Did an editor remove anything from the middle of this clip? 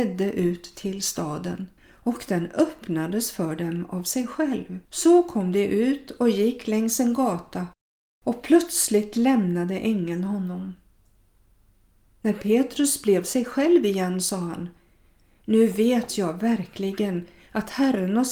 yes; 2 cuts; at 1.8 s, 4.9 s

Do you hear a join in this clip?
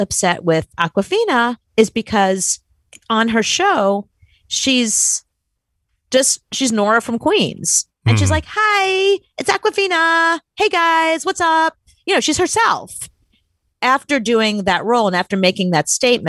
no; 0 cuts

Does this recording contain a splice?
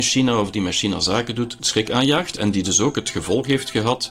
no; 0 cuts

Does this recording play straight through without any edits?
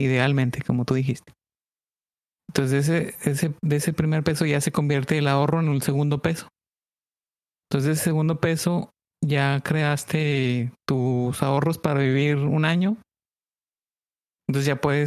yes; 0 cuts

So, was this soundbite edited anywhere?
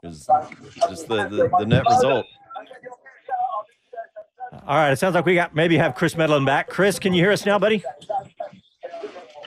no; 0 cuts

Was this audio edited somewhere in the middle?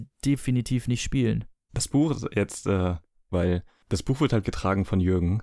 yes; 3 cuts; at 1.7 s, 3.3 s, 4.4 s

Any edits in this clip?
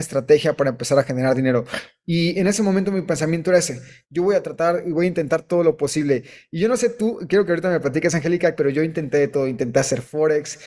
yes; 1 cut; at 8.5 s

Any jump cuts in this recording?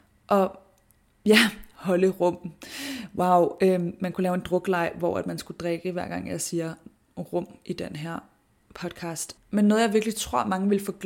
yes; 1 cut; at 9.4 s

